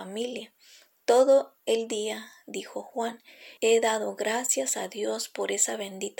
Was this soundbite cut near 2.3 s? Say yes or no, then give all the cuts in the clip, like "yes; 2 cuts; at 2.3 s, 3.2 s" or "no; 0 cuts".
no; 2 cuts; at 0.9 s, 3.6 s